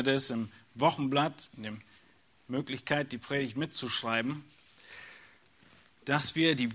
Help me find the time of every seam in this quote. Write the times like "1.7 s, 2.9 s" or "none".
none